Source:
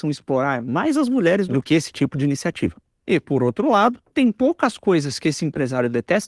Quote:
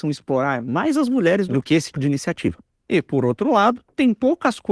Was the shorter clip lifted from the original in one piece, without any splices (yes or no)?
no